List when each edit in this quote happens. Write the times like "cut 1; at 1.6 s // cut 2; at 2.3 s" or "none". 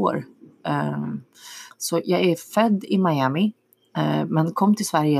cut 1; at 1.7 s